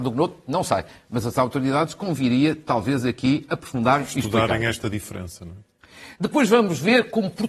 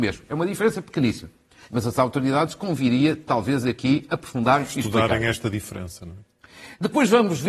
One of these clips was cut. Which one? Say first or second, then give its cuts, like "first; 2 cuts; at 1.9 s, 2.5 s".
second; 1 cut; at 1.6 s